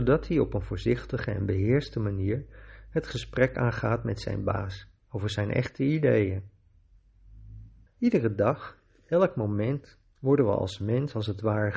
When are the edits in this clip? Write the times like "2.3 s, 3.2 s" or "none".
7.9 s